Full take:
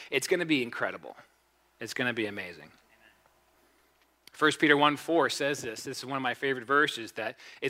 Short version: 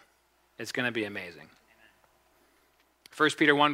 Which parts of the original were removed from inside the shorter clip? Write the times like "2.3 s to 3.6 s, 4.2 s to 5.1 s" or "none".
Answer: none